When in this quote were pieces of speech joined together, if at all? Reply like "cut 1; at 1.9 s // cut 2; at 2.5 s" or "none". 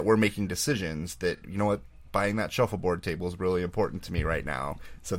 none